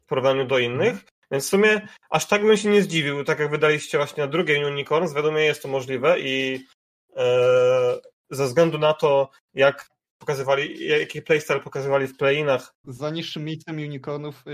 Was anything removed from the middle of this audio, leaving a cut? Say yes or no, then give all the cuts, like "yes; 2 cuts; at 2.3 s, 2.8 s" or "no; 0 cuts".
yes; 1 cut; at 12.8 s